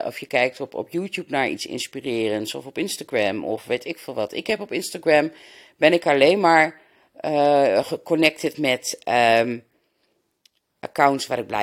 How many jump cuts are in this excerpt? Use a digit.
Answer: 0